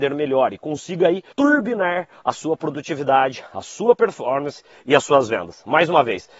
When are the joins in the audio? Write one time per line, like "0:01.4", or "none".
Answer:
0:01.3

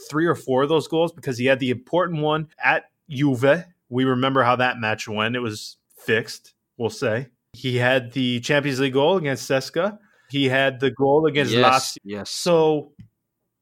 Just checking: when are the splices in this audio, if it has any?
0:10.3
0:11.9

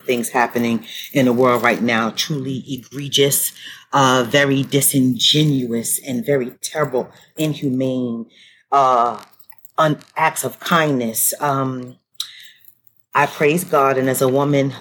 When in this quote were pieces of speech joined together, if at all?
0:07.4

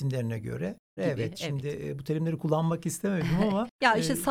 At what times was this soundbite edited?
0:01.0

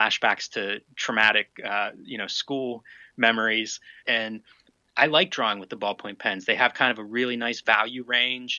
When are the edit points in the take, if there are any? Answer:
0:04.0

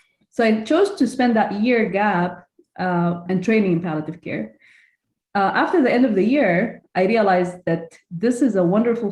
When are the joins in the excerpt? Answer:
0:03.3

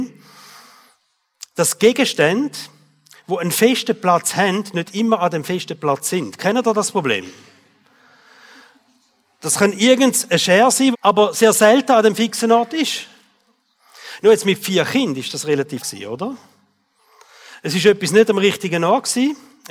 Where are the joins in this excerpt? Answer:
0:10.9
0:15.8

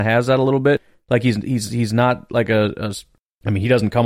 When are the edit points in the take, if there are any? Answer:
none

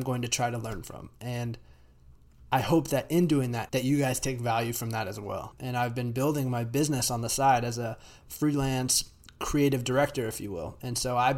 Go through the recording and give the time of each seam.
0:03.7
0:05.5

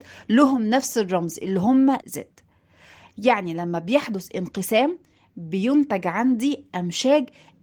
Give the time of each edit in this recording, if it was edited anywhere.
0:02.0

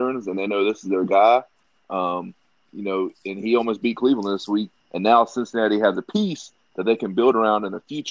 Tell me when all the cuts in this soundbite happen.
0:04.8

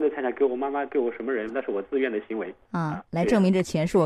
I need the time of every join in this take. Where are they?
0:01.5
0:03.1

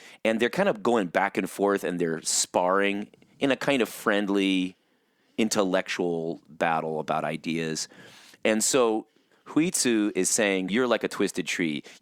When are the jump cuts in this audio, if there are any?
0:10.7

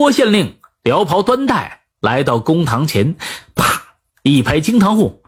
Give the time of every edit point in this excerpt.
none

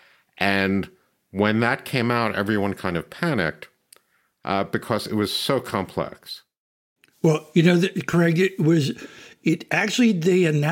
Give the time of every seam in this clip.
none

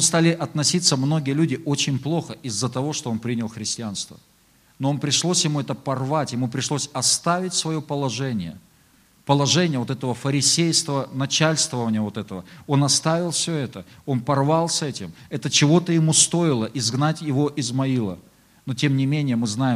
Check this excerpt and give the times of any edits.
none

